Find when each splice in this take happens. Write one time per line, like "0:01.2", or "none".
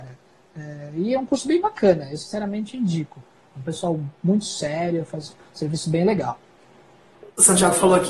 none